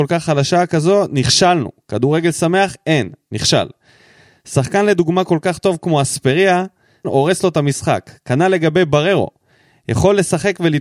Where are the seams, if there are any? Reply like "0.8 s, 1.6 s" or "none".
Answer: 7.0 s